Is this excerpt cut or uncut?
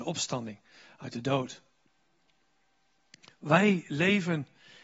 uncut